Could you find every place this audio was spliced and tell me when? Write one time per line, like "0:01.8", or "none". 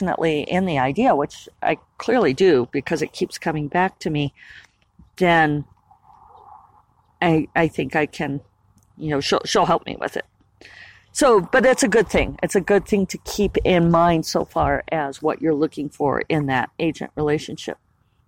none